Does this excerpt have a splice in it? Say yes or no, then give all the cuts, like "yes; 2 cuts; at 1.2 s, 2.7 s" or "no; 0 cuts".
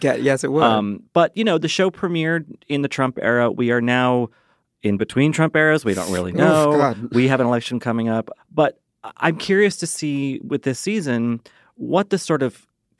no; 0 cuts